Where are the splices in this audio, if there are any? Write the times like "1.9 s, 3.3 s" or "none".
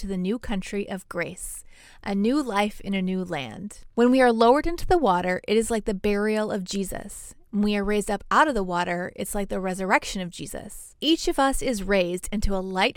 3.9 s